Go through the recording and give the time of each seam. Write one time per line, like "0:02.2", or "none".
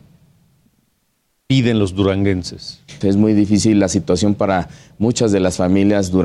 0:03.0